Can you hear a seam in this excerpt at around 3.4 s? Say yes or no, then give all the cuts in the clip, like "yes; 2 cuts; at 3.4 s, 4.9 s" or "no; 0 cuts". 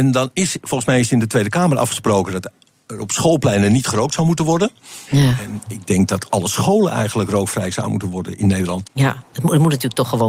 no; 2 cuts; at 5.1 s, 8.8 s